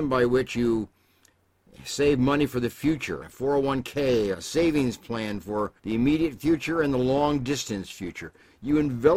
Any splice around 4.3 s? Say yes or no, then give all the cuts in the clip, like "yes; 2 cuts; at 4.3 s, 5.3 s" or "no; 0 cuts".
yes; 3 cuts; at 3.2 s, 4.3 s, 5.8 s